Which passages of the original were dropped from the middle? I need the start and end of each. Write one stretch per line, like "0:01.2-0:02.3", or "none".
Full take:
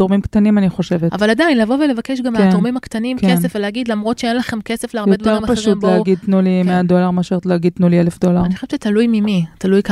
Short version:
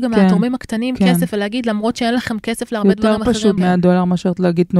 0:05.8-0:06.6